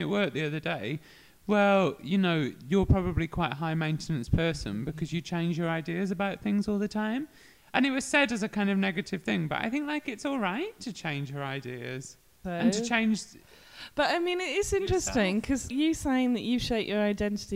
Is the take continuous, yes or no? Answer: no